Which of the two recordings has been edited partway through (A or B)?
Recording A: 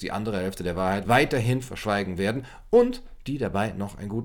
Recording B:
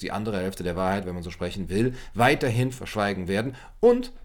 A